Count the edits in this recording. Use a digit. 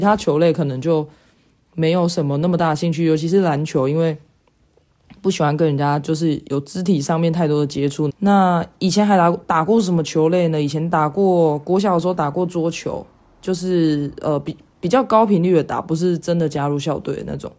1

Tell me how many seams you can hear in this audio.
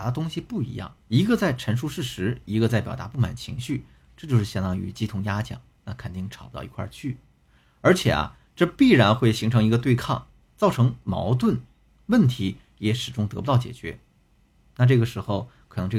1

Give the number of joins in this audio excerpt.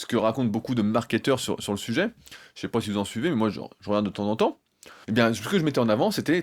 1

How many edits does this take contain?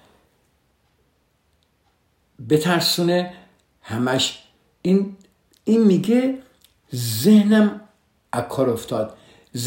0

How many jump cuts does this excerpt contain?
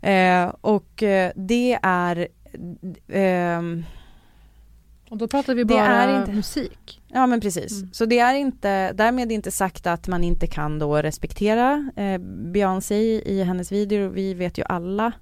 0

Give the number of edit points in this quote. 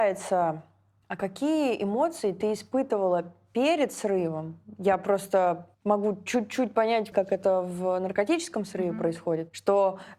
2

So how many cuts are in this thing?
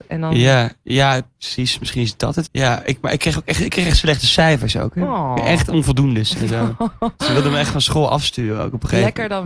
1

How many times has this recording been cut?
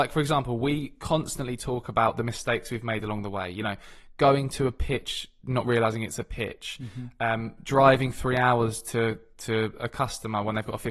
0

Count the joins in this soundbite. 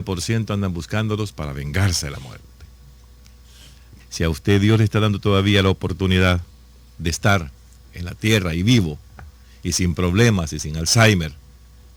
1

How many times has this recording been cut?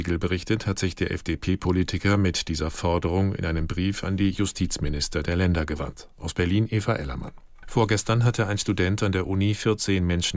1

